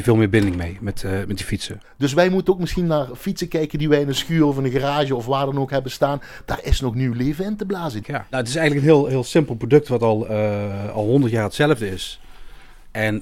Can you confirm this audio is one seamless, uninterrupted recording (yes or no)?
no